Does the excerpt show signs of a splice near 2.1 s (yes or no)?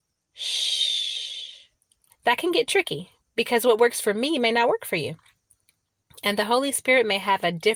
yes